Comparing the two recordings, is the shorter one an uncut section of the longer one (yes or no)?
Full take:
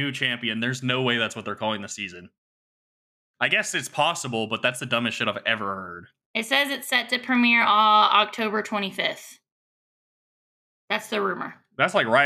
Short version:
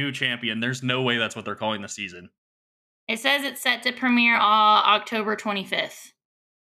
no